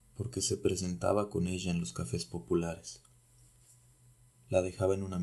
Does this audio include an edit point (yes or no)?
no